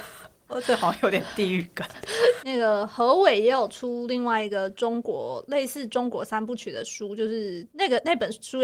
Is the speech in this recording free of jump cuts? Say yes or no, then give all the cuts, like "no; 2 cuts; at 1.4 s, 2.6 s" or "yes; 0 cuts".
no; 1 cut; at 2.4 s